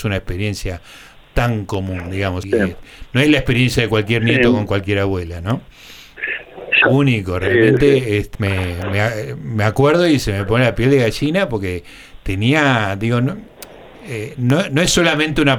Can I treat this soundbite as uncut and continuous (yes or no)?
no